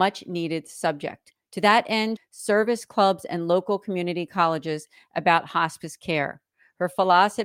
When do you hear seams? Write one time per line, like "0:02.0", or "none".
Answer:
0:02.2